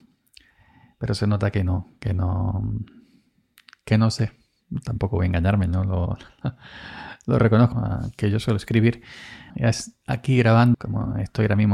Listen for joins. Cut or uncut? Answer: cut